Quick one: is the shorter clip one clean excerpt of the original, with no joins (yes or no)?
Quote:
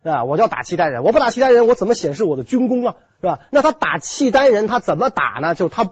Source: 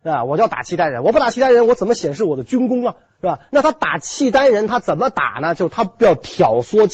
yes